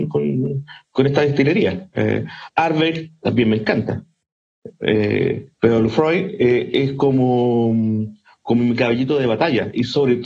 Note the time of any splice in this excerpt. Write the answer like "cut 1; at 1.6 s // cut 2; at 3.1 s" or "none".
cut 1; at 5.5 s